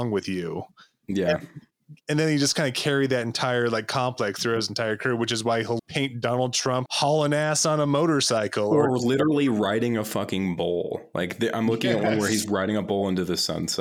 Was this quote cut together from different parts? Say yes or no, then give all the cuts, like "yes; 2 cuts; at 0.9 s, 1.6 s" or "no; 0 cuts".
yes; 2 cuts; at 5.8 s, 6.9 s